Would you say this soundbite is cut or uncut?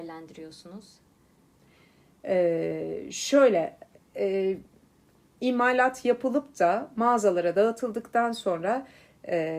uncut